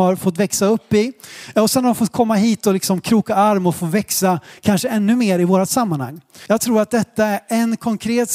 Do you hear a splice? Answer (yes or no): yes